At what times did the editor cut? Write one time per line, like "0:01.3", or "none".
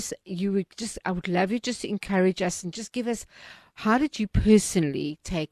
none